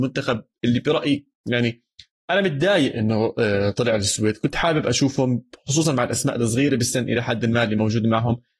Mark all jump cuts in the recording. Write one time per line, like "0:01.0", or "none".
none